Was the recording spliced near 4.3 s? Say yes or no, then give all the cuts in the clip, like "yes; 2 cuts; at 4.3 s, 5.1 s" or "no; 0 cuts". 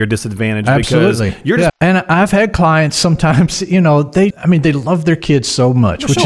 yes; 2 cuts; at 1.7 s, 4.3 s